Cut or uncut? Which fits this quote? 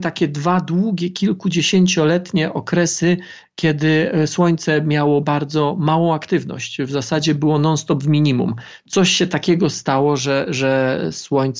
cut